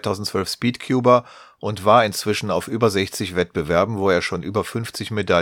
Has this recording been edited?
no; 0 cuts

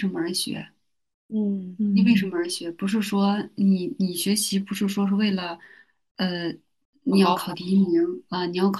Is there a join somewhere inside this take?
no; 0 cuts

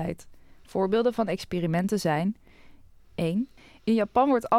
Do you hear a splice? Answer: no; 0 cuts

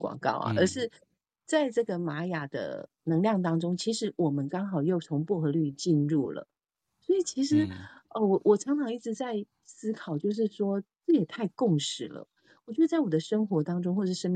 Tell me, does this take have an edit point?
no; 0 cuts

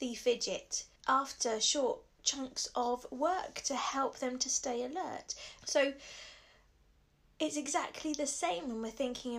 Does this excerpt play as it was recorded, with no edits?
no; 2 cuts; at 1.0 s, 5.6 s

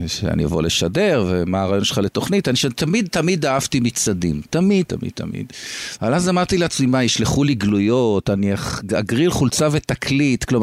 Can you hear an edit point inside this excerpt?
yes; 2 cuts; at 4.9 s, 6.0 s

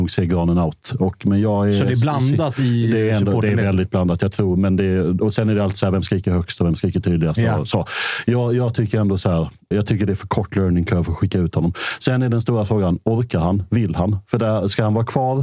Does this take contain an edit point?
yes; 1 cut; at 9.7 s

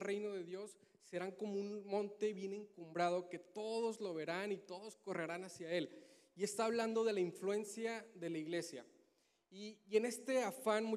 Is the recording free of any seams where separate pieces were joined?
yes; 0 cuts

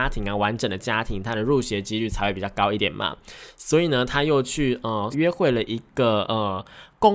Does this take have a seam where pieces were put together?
yes; 2 cuts; at 2.8 s, 5.1 s

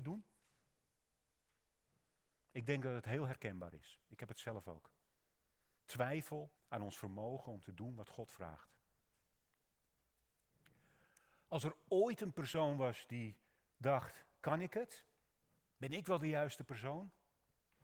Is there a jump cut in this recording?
yes; 1 cut; at 6.6 s

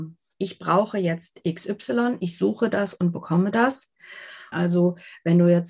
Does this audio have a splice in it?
yes; 1 cut; at 4.5 s

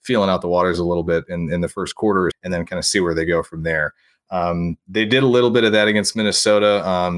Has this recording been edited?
yes; 1 cut; at 2.3 s

